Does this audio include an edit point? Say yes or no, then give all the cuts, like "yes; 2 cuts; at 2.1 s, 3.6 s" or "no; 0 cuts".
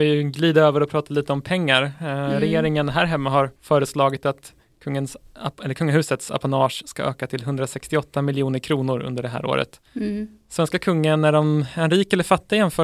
yes; 2 cuts; at 3.6 s, 9.9 s